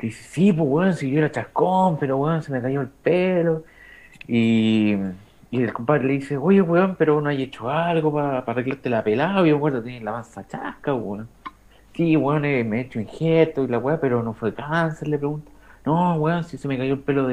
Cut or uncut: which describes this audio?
uncut